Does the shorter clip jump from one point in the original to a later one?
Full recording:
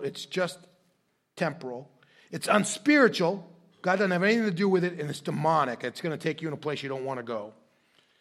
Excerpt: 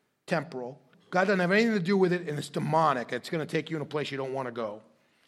yes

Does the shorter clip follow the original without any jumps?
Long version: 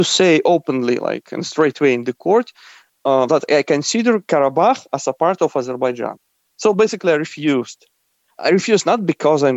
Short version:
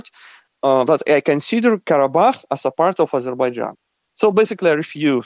yes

